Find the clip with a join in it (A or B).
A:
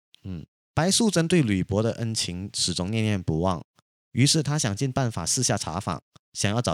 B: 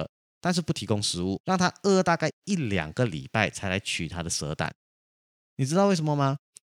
B